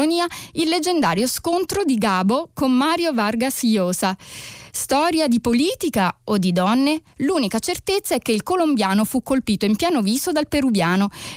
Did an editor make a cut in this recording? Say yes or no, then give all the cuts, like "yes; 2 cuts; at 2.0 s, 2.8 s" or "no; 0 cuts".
no; 0 cuts